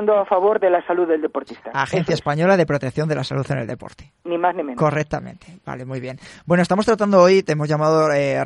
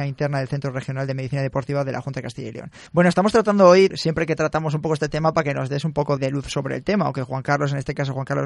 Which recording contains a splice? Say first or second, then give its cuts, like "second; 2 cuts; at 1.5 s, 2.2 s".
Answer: second; 3 cuts; at 2.9 s, 3.9 s, 6.2 s